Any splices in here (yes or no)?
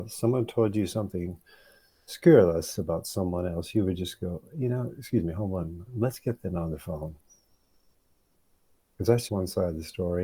yes